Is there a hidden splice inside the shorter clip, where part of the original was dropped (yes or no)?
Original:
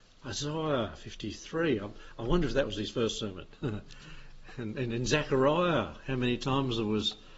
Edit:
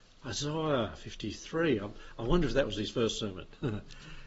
no